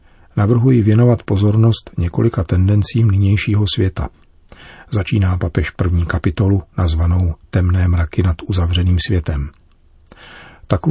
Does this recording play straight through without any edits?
yes; 0 cuts

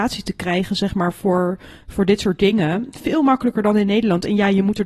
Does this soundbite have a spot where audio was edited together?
no; 0 cuts

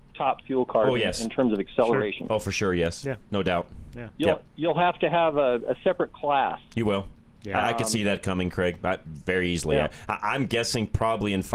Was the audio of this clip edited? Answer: no; 0 cuts

